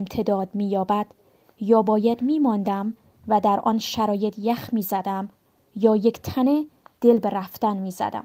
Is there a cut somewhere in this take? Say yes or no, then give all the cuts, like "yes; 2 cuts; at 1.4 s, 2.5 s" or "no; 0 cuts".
no; 0 cuts